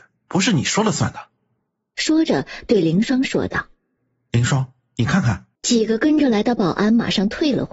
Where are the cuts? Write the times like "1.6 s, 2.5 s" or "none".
5.6 s